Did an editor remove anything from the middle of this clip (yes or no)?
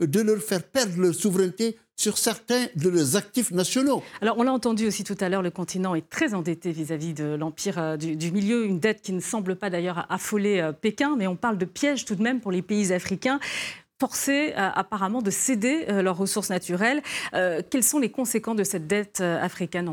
no